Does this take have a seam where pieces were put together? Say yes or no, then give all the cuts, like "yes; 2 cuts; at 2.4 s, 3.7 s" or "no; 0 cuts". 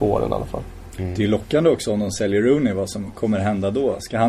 no; 0 cuts